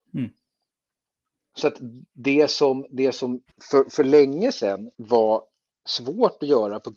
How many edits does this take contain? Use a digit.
2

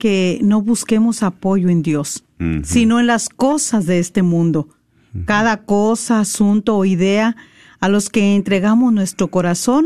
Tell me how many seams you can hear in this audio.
0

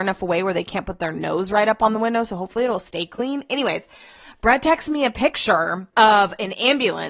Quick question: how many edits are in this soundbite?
1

